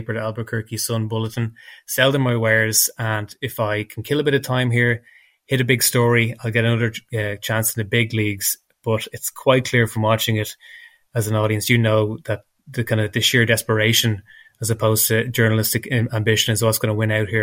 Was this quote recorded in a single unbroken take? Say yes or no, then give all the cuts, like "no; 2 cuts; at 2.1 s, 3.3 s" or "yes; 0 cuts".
yes; 0 cuts